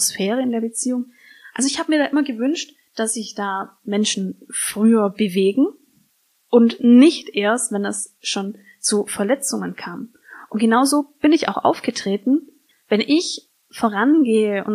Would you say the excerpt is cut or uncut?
cut